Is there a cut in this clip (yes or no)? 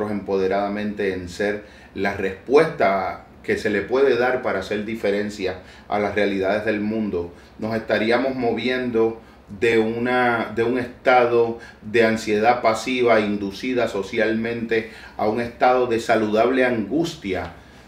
no